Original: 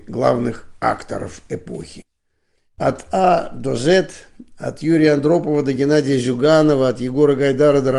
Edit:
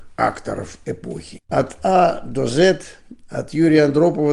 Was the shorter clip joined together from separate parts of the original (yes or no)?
yes